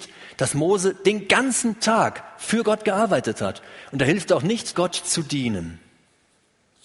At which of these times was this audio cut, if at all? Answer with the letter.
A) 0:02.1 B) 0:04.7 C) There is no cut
B